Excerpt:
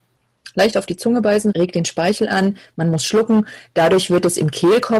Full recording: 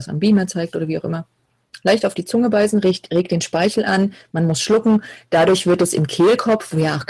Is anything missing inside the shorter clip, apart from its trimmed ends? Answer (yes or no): yes